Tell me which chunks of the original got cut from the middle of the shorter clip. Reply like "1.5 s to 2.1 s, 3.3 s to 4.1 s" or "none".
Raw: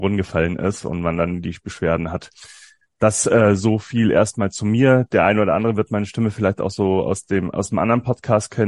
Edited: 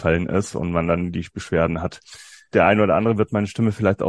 2.8 s to 5.1 s